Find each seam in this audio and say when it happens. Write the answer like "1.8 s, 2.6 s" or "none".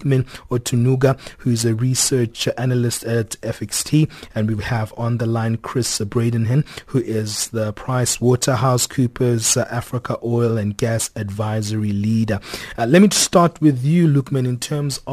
none